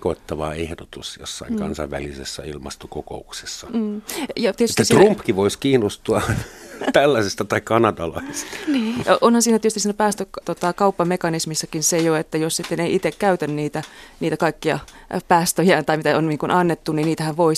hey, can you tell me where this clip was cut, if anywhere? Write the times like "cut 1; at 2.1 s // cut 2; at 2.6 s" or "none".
cut 1; at 10.4 s